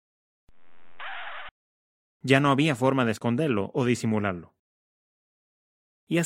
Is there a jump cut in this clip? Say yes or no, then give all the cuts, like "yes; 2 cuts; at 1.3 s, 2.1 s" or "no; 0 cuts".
yes; 1 cut; at 2.1 s